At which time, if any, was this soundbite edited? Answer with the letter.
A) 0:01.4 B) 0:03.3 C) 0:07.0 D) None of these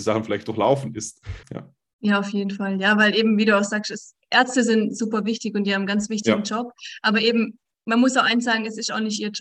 A